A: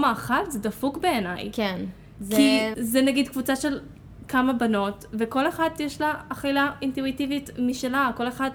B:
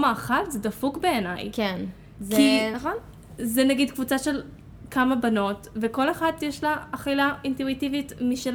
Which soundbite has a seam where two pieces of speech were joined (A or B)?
A